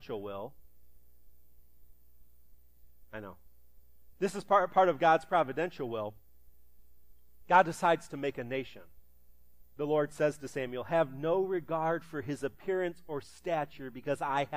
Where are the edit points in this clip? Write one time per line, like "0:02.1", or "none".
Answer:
0:04.1
0:09.8